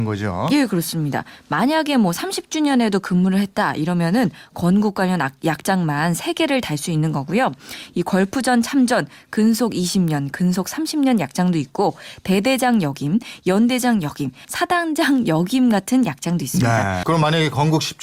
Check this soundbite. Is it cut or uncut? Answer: cut